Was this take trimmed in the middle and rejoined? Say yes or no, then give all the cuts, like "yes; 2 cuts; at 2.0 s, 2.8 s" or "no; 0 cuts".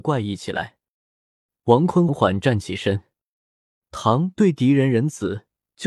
yes; 1 cut; at 2.1 s